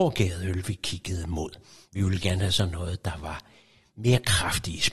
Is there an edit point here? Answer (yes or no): yes